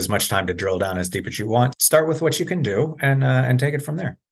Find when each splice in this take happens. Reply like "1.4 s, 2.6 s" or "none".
1.7 s